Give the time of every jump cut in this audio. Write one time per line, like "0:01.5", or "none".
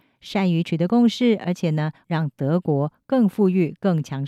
none